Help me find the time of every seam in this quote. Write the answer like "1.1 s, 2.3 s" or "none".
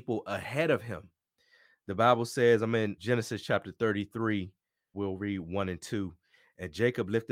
3.0 s, 4.9 s